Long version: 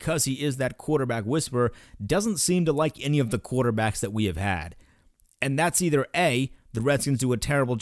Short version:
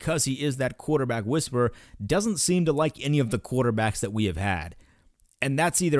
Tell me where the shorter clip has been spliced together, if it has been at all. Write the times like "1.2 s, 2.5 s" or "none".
none